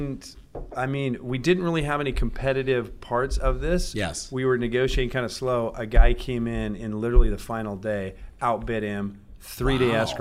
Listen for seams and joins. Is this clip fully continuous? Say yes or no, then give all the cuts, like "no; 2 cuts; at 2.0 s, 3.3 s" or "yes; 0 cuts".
yes; 0 cuts